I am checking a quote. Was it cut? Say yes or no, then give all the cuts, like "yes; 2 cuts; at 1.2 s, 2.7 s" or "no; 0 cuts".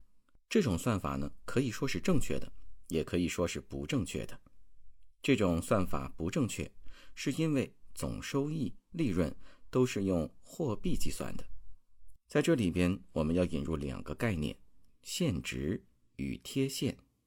yes; 2 cuts; at 8.9 s, 12.2 s